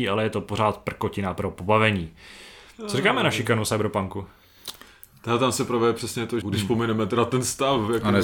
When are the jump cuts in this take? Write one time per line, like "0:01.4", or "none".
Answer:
0:06.4

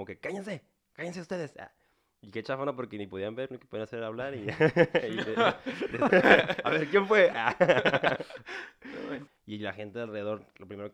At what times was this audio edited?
0:06.1
0:07.3
0:09.3

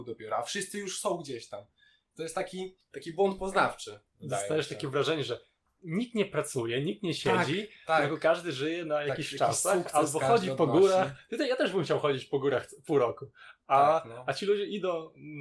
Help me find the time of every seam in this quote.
none

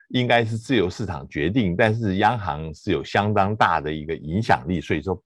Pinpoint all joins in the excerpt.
none

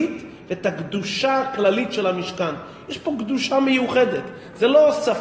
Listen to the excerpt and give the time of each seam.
none

